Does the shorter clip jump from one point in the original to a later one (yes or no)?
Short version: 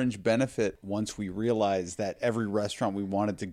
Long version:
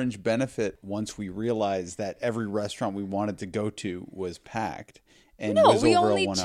no